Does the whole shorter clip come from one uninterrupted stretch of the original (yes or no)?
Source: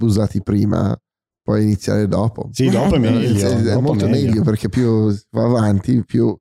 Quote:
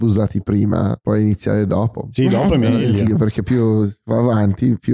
no